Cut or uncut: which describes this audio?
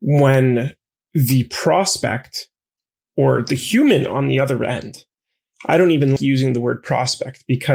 cut